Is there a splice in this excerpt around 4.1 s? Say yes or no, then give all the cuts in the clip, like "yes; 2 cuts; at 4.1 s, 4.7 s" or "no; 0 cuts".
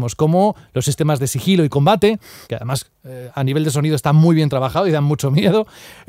no; 1 cut; at 2.4 s